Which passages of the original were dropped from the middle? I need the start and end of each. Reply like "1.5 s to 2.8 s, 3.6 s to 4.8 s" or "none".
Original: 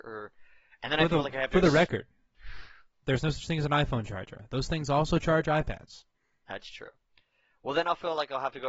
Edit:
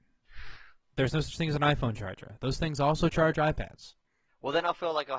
6.4 s to 7.5 s